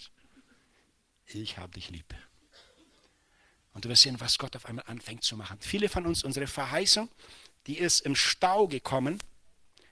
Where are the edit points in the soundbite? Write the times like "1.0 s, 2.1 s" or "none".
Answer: none